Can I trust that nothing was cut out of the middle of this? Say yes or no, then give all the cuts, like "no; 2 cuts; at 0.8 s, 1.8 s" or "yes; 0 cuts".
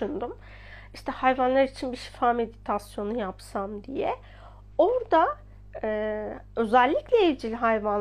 yes; 0 cuts